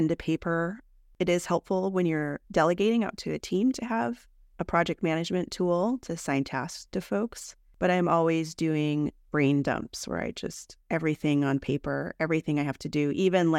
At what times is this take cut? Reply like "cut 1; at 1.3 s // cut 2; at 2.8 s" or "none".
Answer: cut 1; at 2.4 s